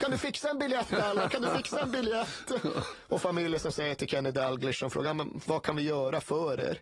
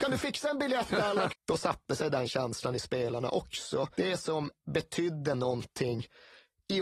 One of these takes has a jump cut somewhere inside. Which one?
second; 2 cuts; at 1.3 s, 3.9 s

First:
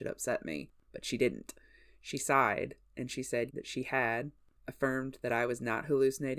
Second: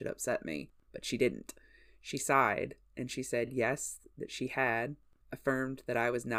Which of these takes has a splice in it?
first; 1 cut; at 3.5 s

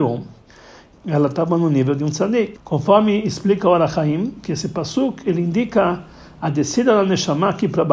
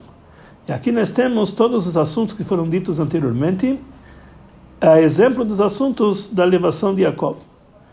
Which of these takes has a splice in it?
first; 2 cuts; at 0.9 s, 2.6 s

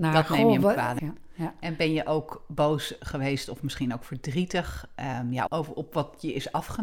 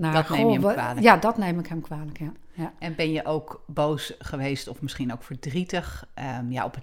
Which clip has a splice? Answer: first; 2 cuts; at 1.0 s, 5.5 s

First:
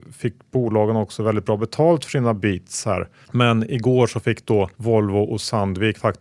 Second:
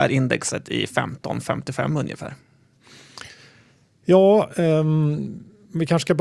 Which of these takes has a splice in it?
first; 2 cuts; at 3.2 s, 4.7 s

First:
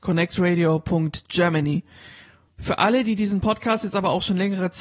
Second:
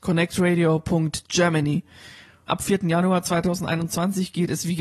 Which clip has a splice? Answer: second; 1 cut; at 2.5 s

